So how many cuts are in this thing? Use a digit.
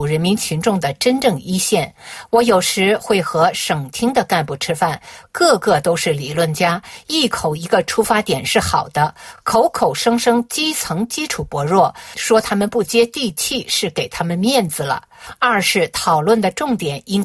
0